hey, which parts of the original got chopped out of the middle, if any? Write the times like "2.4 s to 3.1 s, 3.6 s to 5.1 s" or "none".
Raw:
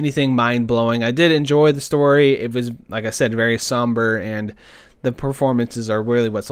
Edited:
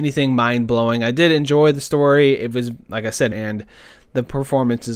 3.3 s to 4.2 s